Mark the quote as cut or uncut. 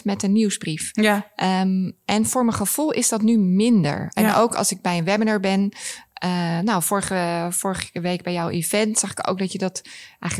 uncut